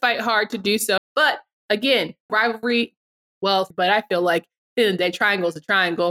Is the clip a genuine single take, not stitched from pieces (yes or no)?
no